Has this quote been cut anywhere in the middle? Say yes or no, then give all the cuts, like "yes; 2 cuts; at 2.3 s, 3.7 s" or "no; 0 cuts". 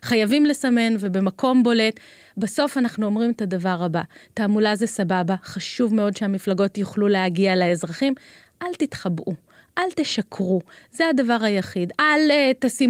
yes; 1 cut; at 11.9 s